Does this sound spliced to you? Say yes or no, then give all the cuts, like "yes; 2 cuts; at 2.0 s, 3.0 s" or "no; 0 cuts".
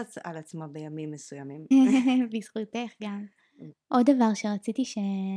yes; 2 cuts; at 1.7 s, 3.7 s